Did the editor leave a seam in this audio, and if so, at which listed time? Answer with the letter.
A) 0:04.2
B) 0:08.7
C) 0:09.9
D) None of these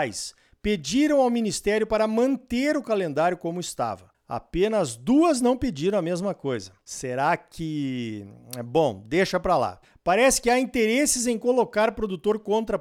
D